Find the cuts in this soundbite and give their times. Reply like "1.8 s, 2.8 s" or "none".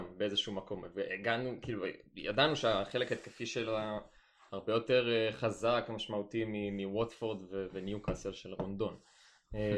none